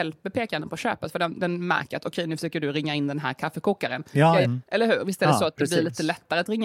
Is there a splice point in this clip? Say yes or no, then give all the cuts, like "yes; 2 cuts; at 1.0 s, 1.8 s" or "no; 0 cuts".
yes; 1 cut; at 4.4 s